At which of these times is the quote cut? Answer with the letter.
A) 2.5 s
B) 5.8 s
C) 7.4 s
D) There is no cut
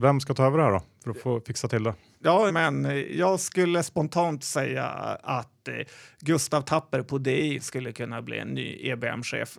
A